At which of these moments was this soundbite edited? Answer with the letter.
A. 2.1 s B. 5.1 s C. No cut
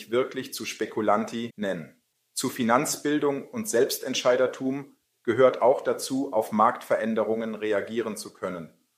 B